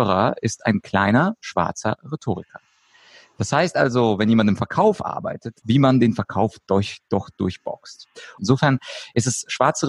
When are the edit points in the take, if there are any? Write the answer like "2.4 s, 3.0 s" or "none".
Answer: 5.6 s, 8.4 s